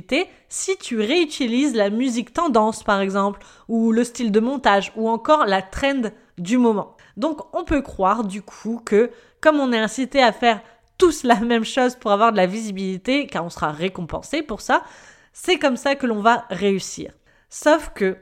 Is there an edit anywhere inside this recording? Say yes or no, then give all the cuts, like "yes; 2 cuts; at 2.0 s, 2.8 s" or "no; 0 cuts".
no; 0 cuts